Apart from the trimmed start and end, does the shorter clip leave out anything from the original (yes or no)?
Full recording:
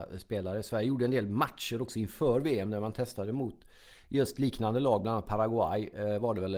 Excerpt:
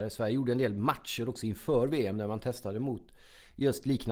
no